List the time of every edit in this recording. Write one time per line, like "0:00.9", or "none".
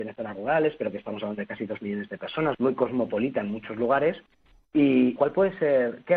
0:02.5
0:05.2